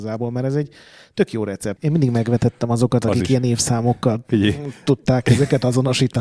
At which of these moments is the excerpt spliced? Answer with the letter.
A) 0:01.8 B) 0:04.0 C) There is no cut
A